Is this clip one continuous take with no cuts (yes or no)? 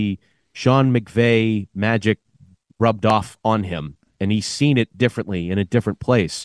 yes